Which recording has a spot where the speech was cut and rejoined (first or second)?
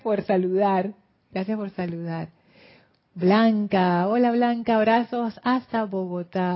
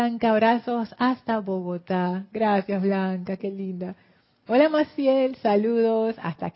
second